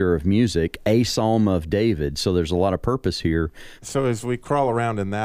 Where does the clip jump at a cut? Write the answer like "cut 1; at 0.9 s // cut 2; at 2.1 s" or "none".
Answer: cut 1; at 3.8 s